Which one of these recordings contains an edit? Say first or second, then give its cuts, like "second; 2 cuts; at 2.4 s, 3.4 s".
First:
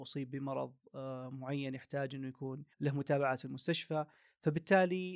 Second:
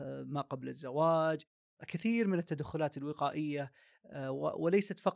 first; 1 cut; at 2.7 s